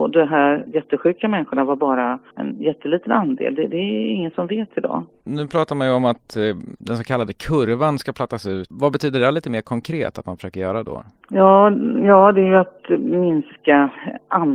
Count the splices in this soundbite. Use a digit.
0